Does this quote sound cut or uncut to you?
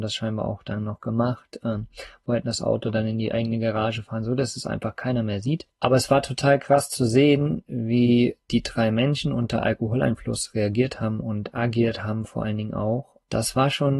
uncut